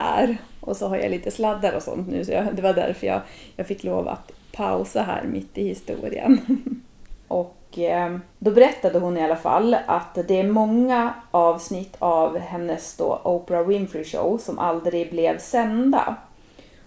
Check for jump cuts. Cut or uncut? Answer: cut